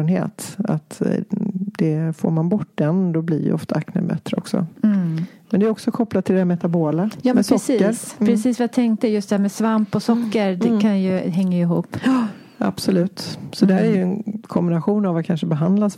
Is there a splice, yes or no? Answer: no